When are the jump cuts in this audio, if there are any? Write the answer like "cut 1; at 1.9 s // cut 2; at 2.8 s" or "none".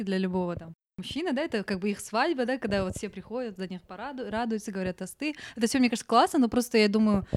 none